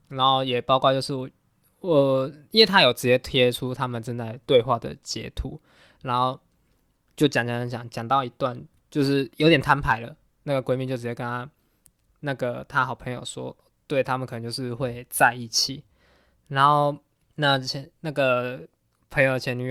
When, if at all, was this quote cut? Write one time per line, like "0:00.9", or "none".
none